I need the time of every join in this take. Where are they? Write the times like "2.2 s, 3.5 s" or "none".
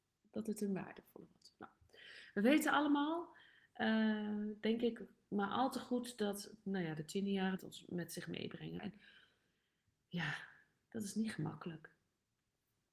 7.6 s, 8.8 s